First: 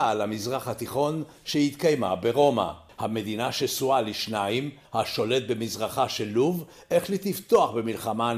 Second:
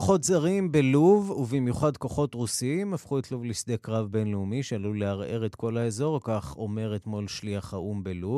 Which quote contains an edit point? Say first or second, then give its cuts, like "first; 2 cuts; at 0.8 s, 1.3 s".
first; 2 cuts; at 2.9 s, 4.8 s